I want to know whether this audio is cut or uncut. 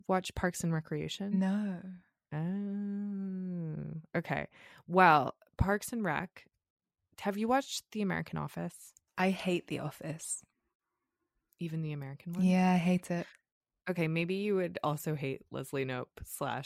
uncut